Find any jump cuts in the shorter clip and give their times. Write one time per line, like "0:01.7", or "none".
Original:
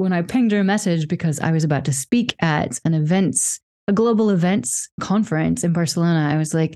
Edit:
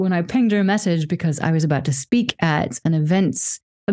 none